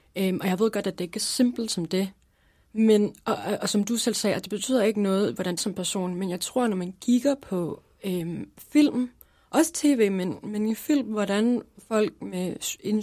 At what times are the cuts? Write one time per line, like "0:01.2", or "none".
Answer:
0:05.6

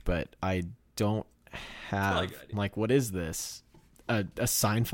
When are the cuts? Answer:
0:02.5

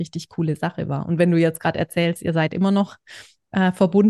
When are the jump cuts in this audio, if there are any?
none

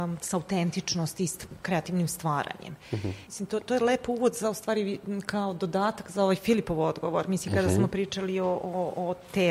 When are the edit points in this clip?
0:03.3

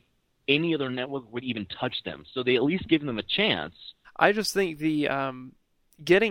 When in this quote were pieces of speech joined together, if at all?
0:04.0

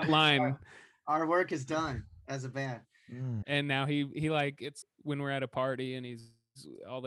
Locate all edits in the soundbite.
0:03.4
0:04.8

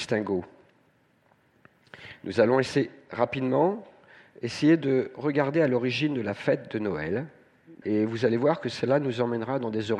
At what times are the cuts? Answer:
0:07.8

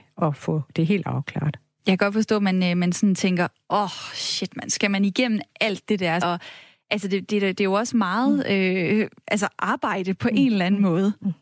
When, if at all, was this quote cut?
0:06.2

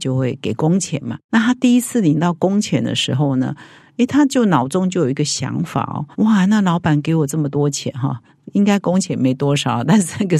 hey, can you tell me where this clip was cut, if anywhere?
0:06.1

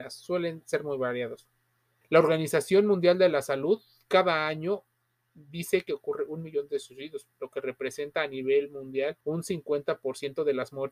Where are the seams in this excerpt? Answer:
0:02.0
0:09.2

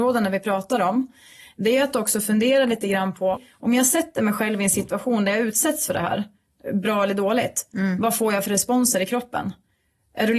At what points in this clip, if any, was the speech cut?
0:03.3

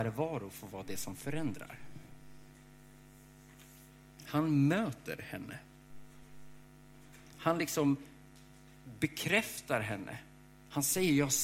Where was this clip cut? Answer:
none

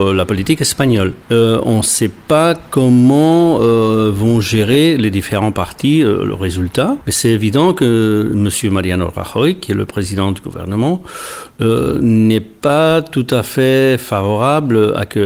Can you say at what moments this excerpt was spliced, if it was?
none

